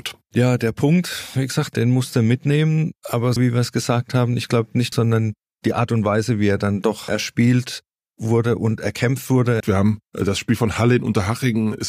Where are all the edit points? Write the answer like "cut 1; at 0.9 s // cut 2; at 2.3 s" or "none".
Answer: cut 1; at 3.4 s // cut 2; at 4.9 s // cut 3; at 9.6 s